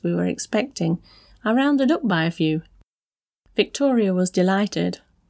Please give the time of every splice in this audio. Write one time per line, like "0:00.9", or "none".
none